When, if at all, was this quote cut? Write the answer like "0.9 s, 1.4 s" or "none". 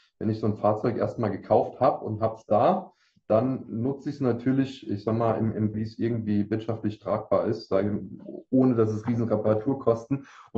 5.7 s